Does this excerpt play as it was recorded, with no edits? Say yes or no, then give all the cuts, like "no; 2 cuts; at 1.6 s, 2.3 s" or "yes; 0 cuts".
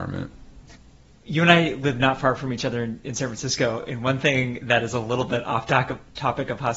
yes; 0 cuts